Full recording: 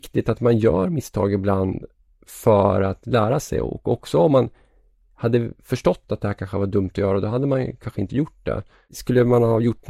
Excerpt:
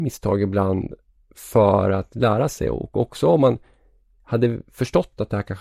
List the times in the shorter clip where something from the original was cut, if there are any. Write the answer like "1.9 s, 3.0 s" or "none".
none